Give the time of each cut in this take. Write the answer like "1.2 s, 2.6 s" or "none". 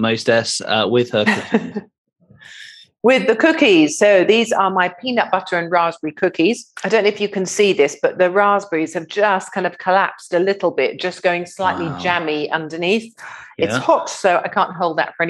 6.7 s